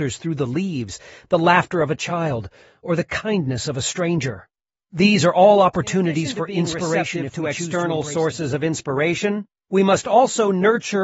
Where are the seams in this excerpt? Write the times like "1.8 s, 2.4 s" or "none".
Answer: none